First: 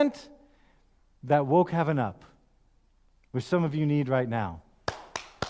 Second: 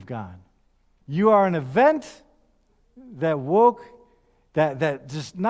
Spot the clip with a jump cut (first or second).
second